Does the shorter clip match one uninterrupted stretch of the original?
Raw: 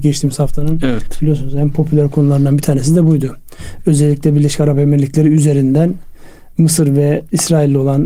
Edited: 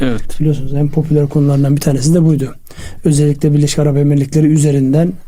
yes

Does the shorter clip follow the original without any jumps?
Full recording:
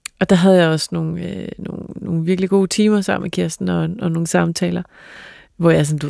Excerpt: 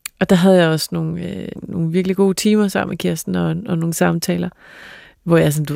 no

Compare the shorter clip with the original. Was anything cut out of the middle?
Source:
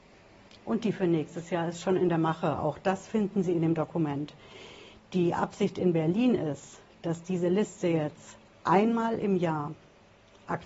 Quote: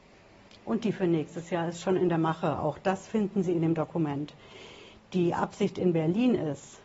no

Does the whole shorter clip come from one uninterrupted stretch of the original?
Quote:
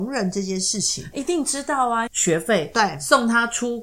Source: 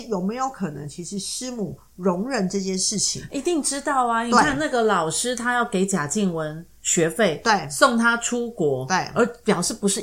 no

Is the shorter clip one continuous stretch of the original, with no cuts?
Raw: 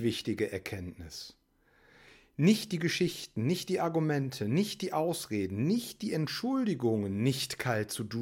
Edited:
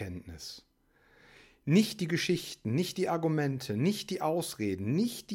yes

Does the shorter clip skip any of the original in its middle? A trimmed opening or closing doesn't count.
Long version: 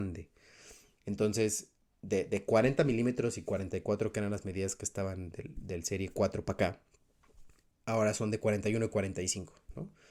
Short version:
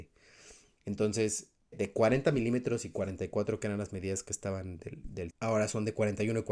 yes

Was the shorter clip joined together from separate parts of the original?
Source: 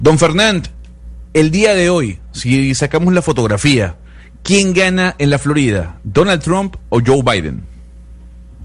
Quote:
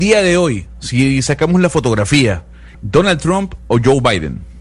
yes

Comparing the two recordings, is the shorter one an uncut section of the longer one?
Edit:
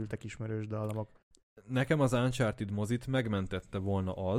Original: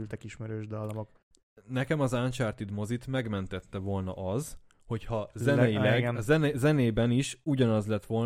yes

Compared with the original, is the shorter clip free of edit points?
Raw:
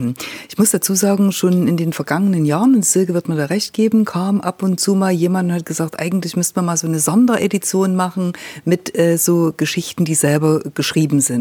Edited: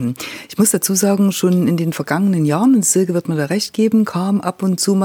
yes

